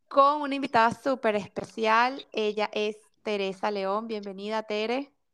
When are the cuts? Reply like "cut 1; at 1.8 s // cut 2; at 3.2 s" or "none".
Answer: none

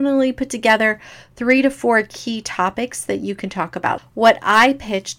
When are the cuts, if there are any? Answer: cut 1; at 4.0 s

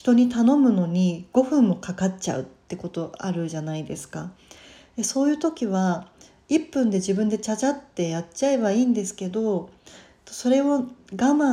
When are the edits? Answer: none

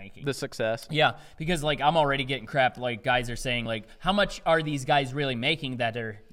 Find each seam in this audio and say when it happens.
none

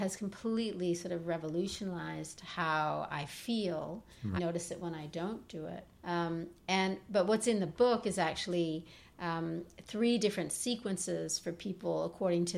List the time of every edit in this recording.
cut 1; at 4.4 s // cut 2; at 5.9 s

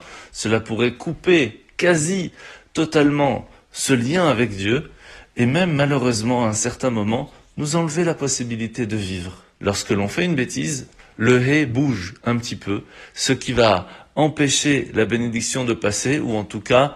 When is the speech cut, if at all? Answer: cut 1; at 9.6 s

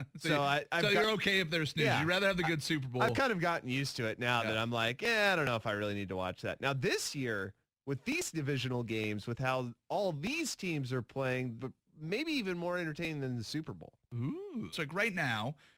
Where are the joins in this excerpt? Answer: cut 1; at 11.6 s // cut 2; at 14.7 s

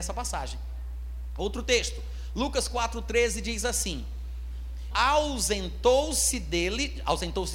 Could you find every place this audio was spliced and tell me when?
cut 1; at 4.9 s

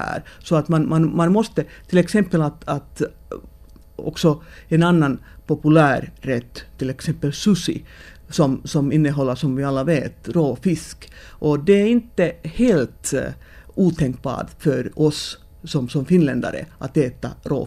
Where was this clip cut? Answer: none

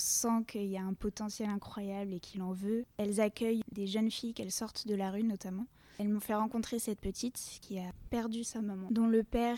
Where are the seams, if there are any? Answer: cut 1; at 2.8 s

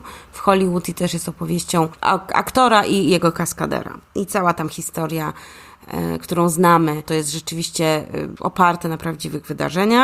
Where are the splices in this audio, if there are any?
cut 1; at 4.1 s // cut 2; at 7.0 s

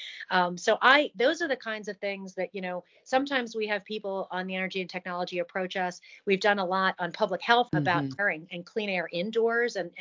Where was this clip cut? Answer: cut 1; at 7.7 s

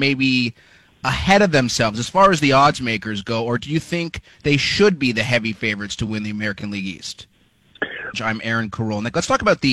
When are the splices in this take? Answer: cut 1; at 8.1 s

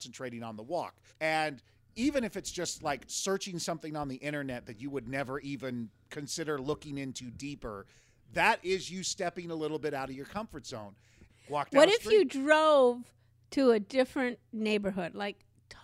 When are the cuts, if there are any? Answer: cut 1; at 1.1 s // cut 2; at 11.3 s

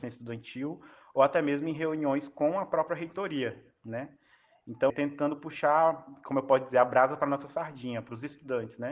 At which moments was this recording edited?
cut 1; at 4.9 s

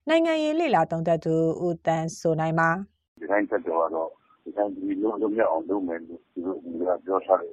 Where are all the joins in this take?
cut 1; at 6.3 s

